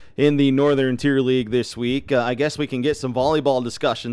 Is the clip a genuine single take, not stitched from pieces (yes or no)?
yes